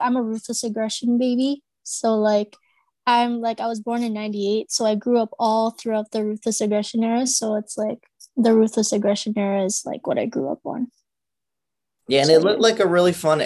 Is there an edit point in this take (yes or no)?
no